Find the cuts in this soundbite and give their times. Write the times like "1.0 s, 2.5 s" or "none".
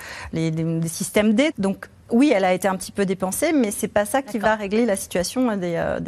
1.5 s